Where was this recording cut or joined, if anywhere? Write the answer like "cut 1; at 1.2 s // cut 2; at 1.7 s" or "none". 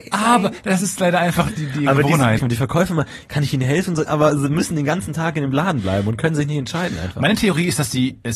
cut 1; at 2.4 s // cut 2; at 4.1 s